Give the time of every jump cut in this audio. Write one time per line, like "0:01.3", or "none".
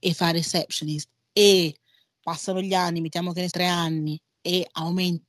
0:03.5